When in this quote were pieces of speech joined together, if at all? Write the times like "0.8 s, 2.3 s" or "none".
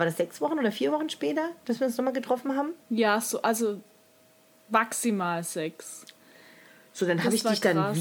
2.8 s